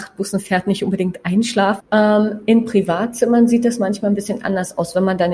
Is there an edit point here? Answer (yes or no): yes